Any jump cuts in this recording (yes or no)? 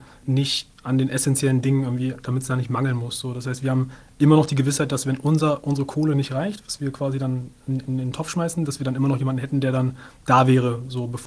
no